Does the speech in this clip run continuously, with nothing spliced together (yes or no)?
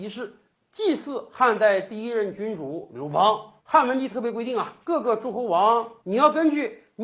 no